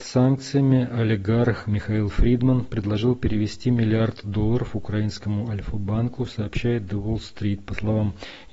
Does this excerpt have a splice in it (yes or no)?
no